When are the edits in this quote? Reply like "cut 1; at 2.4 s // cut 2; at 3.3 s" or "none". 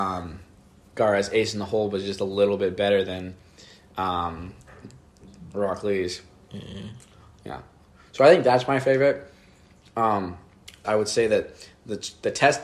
cut 1; at 10.8 s